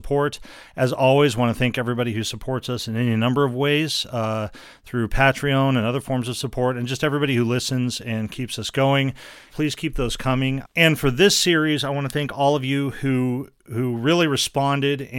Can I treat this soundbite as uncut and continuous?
no; 2 cuts; at 9.5 s, 10.6 s

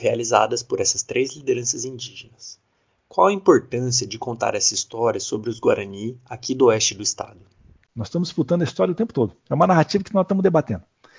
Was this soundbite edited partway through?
no; 0 cuts

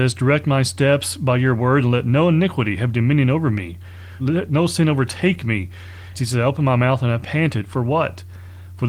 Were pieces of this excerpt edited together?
yes; 2 cuts; at 4.2 s, 6.1 s

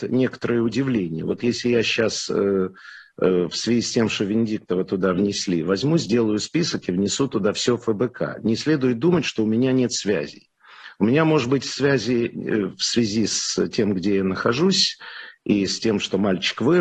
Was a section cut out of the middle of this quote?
no; 0 cuts

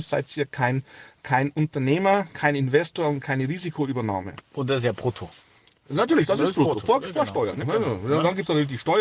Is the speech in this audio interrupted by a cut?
yes; 1 cut; at 7.6 s

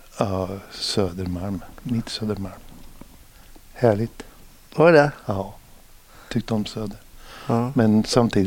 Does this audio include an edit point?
no; 0 cuts

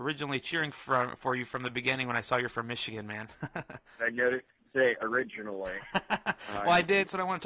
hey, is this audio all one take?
yes; 0 cuts

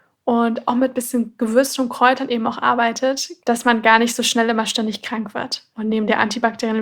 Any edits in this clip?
yes; 2 cuts; at 3.4 s, 5.7 s

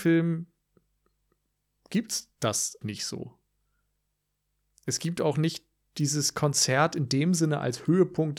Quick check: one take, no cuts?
no; 1 cut; at 2.8 s

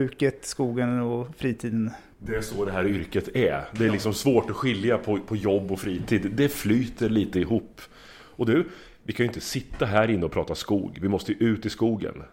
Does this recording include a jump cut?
no; 0 cuts

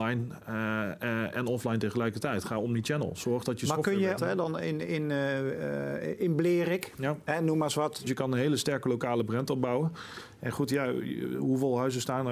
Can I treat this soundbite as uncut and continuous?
no; 2 cuts; at 4.2 s, 8.1 s

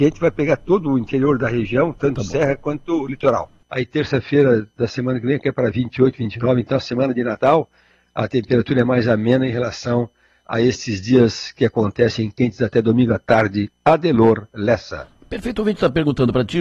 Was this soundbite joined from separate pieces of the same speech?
yes; 1 cut; at 3.6 s

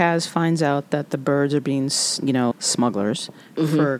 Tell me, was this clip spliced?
yes; 1 cut; at 2.5 s

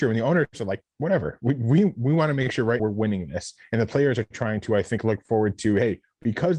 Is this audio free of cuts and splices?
no; 1 cut; at 2.8 s

